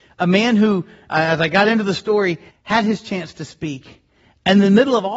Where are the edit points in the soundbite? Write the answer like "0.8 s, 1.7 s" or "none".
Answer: 1.1 s, 2.5 s